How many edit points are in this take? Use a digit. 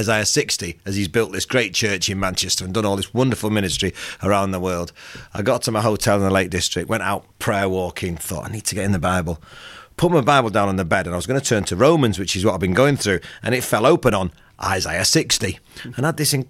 1